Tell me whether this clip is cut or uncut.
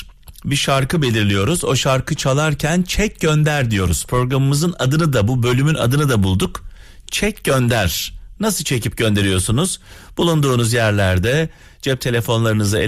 uncut